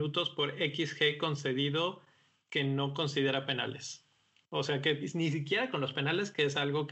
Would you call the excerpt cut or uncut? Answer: cut